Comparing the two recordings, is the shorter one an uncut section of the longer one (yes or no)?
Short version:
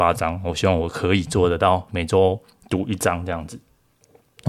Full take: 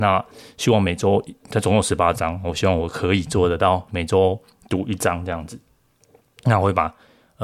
yes